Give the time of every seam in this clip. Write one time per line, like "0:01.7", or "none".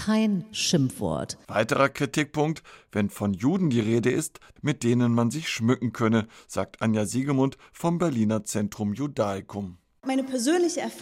0:04.6
0:09.9